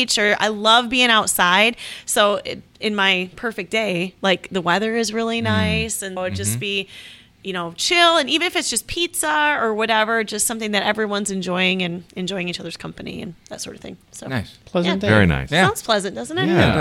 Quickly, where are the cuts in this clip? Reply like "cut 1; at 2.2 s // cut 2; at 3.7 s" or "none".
cut 1; at 6.2 s